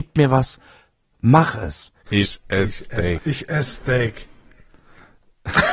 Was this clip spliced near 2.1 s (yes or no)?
yes